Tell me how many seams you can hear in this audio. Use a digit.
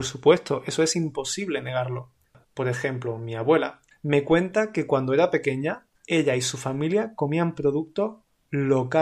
3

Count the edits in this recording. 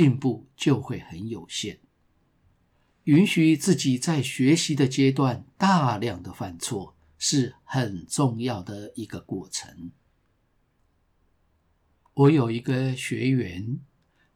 1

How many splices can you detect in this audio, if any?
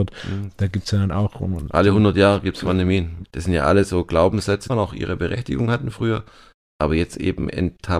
2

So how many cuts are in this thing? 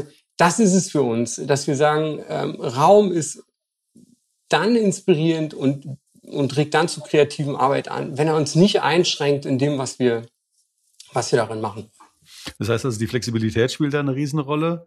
0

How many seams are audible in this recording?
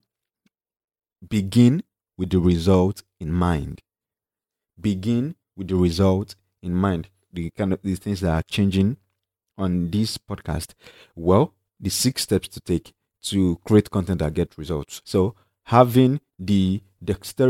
3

